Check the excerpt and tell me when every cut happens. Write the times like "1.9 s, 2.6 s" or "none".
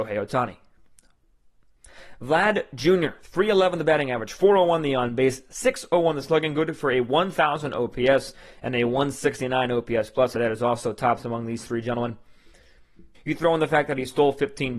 10.3 s, 13.1 s